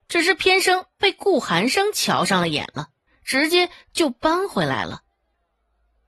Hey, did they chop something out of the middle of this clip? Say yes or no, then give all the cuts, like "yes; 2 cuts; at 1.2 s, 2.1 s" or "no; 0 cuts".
yes; 1 cut; at 3.1 s